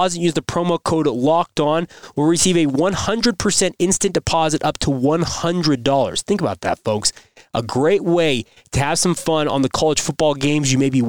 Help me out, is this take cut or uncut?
uncut